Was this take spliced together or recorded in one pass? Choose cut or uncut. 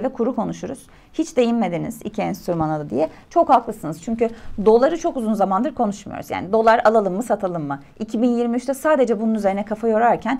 uncut